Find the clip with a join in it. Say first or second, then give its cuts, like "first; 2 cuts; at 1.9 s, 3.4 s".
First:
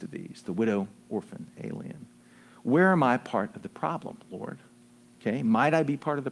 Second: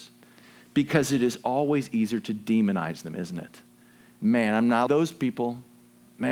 second; 1 cut; at 4.9 s